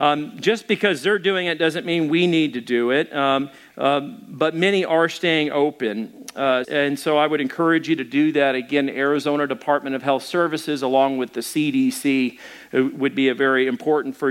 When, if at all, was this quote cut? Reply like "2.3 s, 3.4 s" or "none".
6.6 s